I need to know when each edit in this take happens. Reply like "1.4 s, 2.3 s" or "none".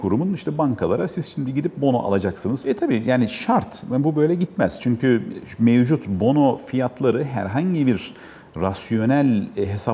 2.6 s